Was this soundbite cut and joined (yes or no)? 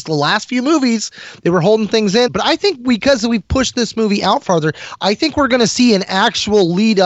yes